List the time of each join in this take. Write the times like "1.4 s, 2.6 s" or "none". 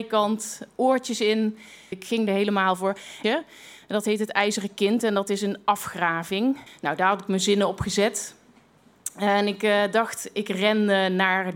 1.9 s, 3.2 s, 6.7 s